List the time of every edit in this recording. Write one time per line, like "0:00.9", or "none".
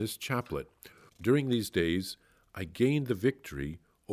0:01.1